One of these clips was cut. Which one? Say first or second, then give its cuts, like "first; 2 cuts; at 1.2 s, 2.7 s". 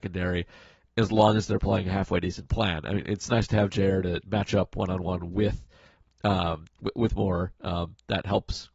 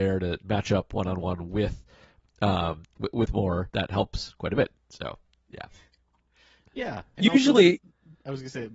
second; 1 cut; at 3.7 s